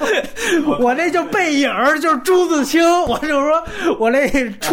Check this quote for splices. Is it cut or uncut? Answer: uncut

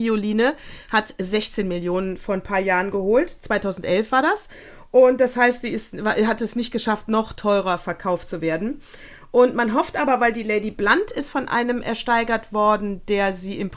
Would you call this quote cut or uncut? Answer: uncut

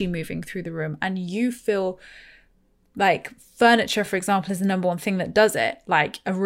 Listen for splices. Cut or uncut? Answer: uncut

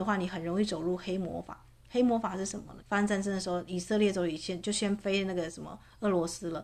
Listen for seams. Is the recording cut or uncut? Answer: cut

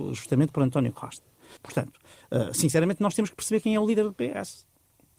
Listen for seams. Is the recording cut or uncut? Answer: cut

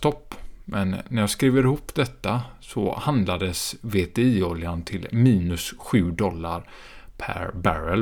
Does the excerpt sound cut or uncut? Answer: uncut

